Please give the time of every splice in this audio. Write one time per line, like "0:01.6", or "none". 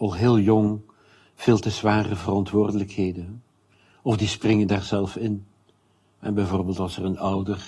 none

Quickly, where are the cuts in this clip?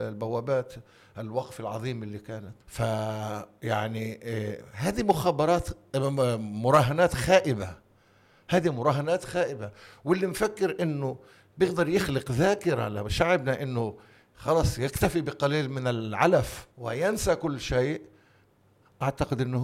0:02.6
0:16.7

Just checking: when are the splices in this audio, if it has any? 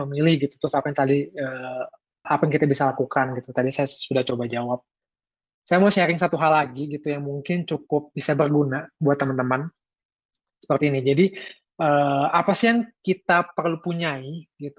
0:02.2

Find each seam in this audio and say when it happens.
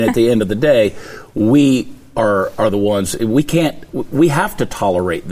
none

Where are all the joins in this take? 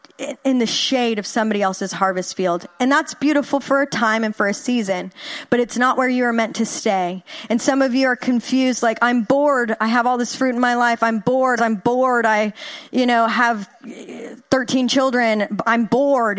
0:11.6

